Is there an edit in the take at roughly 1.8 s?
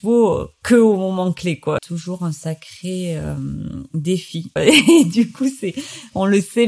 yes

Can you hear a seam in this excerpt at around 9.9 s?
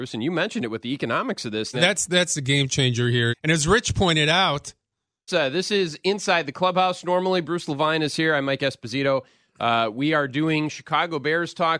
no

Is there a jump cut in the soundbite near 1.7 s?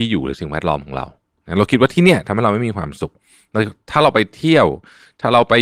no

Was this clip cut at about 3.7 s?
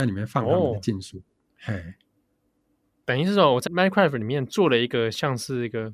yes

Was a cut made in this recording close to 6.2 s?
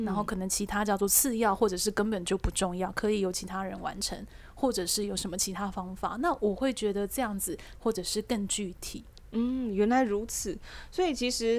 no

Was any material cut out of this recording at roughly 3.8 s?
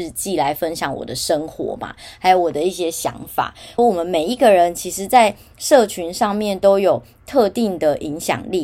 yes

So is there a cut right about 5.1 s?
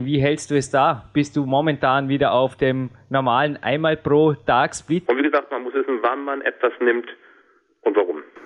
yes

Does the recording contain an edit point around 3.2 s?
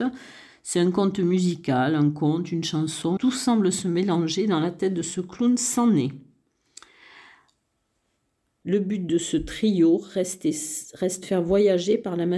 yes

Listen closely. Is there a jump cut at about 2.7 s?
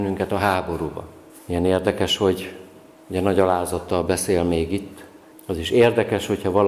no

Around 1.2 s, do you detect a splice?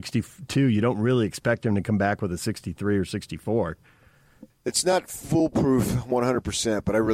no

